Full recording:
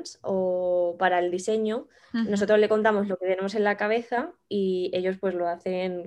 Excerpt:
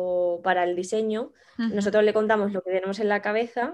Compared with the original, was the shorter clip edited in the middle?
no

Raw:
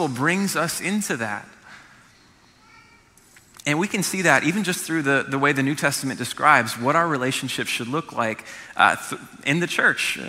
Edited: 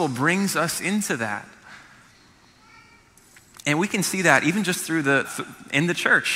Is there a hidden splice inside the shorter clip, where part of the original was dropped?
yes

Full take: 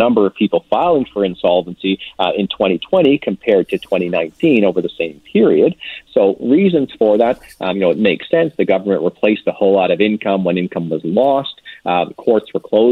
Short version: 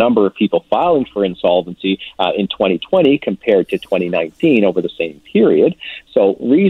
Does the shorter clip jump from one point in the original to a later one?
no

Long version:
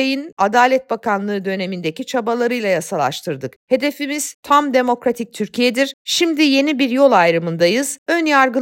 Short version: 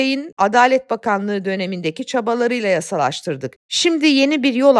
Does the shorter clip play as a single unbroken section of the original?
no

